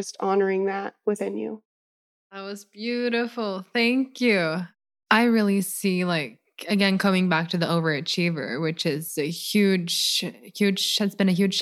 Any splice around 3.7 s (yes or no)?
no